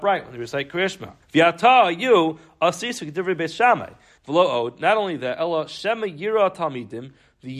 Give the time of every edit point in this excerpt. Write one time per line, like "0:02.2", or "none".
0:01.2
0:04.2